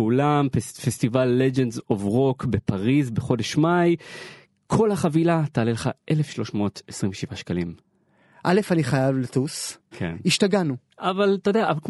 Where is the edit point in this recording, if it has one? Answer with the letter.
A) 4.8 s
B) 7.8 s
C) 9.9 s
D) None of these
C